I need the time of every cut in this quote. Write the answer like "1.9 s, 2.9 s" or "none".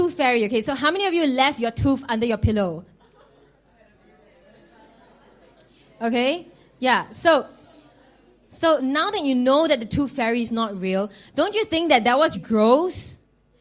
8.8 s, 12.3 s

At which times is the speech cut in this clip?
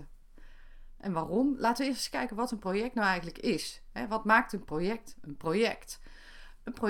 none

